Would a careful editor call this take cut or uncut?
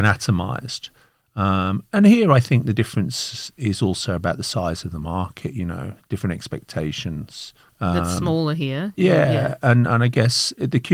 uncut